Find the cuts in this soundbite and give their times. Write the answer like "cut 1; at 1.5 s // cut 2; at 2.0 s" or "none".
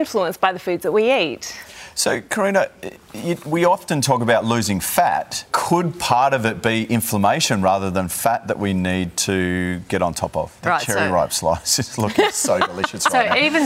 cut 1; at 5.5 s // cut 2; at 10.6 s